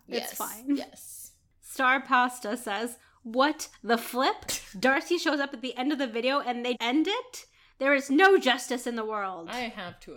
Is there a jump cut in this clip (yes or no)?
yes